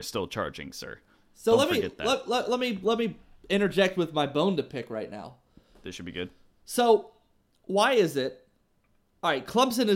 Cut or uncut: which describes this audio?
uncut